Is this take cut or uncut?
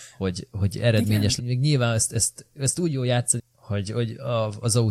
cut